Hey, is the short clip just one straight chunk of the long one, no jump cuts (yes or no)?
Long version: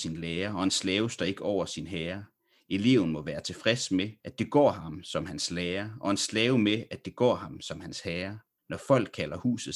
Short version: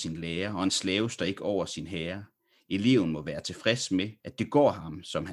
yes